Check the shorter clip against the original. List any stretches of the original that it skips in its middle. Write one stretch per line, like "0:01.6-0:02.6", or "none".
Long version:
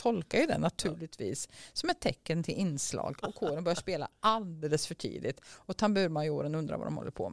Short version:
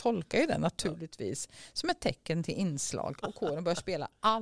none